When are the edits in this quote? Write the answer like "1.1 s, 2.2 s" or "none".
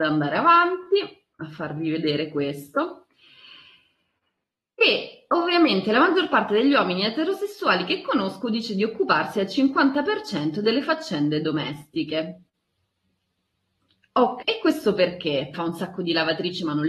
1.3 s, 14.4 s, 15.5 s